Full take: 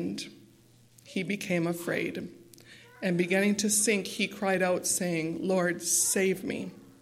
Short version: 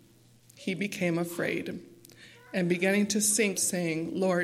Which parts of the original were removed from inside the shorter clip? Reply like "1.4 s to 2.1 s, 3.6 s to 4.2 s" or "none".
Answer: 4.0 s to 4.8 s